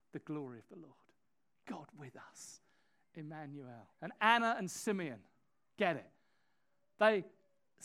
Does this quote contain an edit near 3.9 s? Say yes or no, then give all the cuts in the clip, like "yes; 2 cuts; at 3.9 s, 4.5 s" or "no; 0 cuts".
yes; 1 cut; at 3.9 s